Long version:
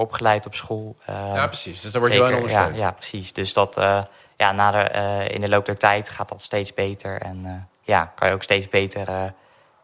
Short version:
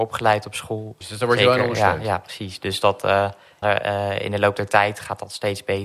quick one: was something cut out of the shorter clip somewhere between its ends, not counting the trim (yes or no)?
yes